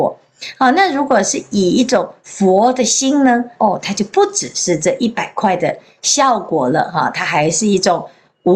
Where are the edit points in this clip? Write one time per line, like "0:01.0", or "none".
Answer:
0:03.6